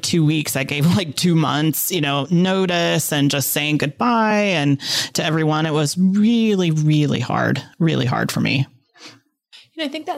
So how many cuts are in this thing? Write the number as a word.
zero